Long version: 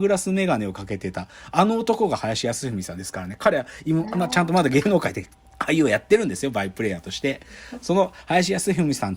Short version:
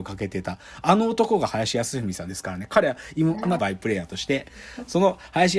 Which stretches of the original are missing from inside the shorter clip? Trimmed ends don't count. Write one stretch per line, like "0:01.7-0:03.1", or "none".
0:04.3-0:06.5